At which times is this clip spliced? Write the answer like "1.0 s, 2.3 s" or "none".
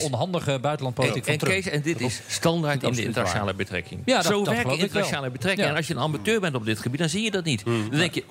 none